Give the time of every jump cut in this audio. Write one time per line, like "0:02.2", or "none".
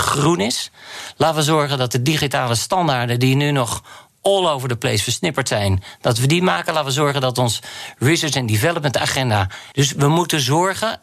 0:09.7